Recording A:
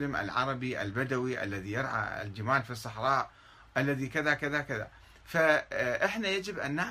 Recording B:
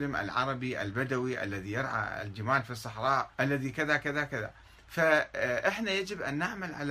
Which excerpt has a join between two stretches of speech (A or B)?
B